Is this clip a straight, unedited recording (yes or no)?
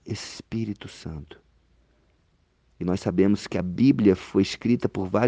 yes